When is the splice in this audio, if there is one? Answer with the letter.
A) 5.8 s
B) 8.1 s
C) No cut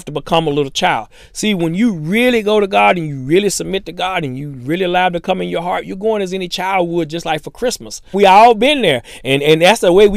B